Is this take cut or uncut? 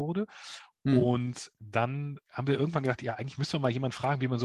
uncut